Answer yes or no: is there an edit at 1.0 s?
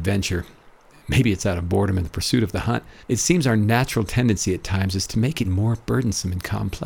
no